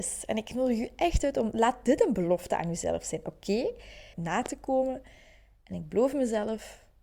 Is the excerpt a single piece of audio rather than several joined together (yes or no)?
no